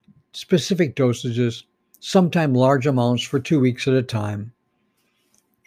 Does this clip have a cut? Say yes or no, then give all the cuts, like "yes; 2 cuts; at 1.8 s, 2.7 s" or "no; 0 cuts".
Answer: no; 0 cuts